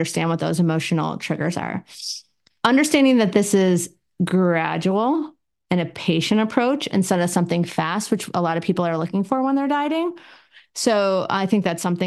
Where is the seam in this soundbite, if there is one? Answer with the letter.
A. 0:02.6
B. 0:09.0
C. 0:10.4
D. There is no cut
D